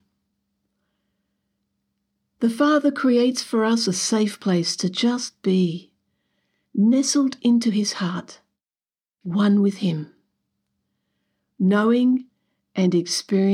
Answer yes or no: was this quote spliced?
no